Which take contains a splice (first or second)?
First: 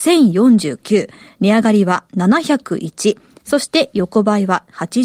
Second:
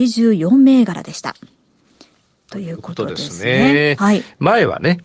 second